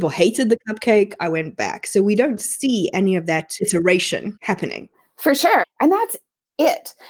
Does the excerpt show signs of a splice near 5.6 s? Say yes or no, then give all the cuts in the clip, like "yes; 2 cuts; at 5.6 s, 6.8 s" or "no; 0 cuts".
yes; 1 cut; at 5.6 s